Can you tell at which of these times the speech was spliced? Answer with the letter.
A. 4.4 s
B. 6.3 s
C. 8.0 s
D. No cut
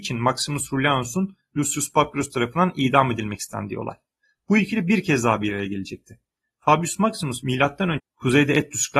C